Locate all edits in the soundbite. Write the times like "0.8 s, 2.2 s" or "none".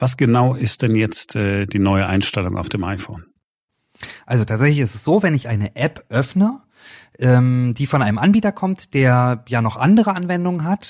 none